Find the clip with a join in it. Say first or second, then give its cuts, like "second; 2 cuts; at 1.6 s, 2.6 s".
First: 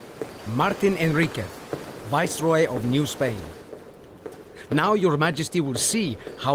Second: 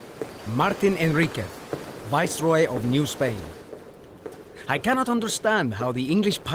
first; 1 cut; at 4.7 s